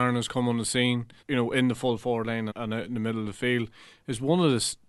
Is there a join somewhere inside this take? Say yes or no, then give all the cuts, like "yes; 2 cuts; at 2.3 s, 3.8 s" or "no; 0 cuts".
yes; 2 cuts; at 1.2 s, 2.5 s